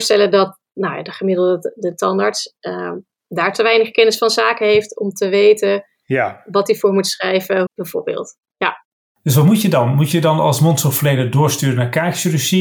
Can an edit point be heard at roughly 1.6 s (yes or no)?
no